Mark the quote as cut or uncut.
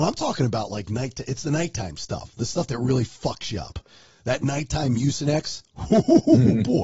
uncut